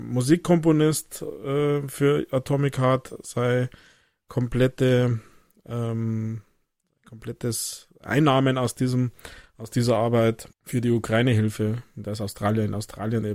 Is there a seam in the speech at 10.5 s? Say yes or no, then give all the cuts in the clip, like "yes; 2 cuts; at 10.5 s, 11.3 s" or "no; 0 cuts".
yes; 1 cut; at 10.5 s